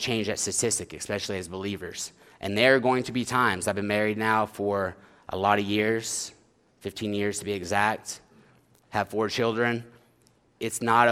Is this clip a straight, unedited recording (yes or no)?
yes